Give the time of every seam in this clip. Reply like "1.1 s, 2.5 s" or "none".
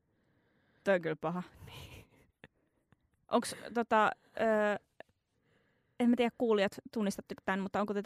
none